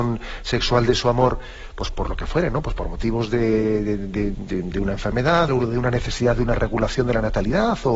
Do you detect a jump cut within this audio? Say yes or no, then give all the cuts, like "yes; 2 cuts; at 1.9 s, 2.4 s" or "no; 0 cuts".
yes; 2 cuts; at 4.3 s, 5.5 s